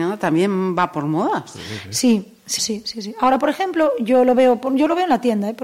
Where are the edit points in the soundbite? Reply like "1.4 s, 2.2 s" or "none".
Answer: 2.6 s

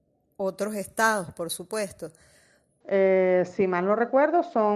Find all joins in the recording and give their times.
2.8 s

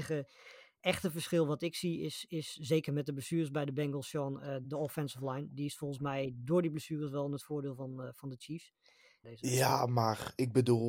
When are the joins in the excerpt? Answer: 4.6 s, 9.2 s

